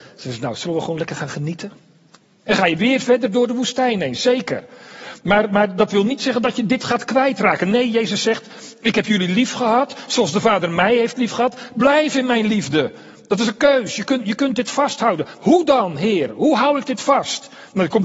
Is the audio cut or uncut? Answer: cut